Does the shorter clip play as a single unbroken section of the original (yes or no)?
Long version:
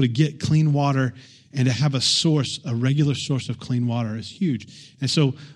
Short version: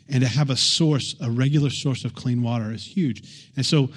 yes